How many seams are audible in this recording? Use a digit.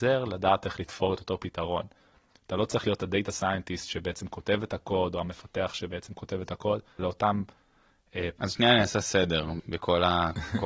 3